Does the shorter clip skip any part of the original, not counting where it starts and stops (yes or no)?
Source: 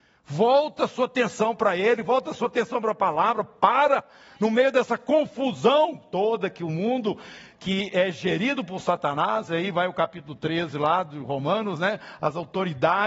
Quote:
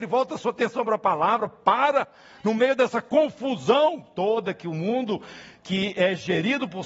no